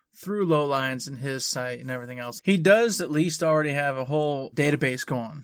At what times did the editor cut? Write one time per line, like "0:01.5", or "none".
0:02.4
0:04.5